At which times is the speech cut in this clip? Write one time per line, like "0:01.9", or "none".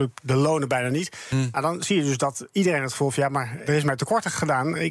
0:03.6